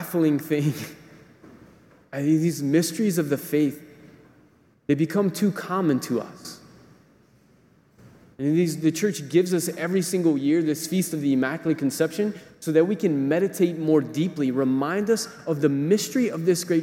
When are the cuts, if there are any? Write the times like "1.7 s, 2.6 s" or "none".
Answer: none